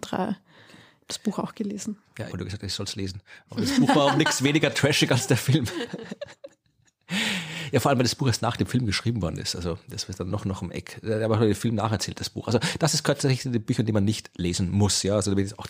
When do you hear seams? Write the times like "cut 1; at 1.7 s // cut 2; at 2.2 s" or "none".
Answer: cut 1; at 2.3 s